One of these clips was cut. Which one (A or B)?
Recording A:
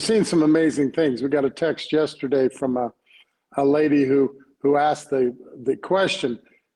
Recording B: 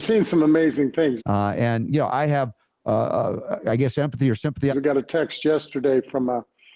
B